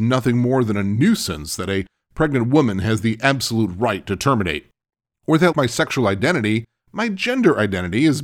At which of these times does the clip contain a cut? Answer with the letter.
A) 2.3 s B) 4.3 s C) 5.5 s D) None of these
C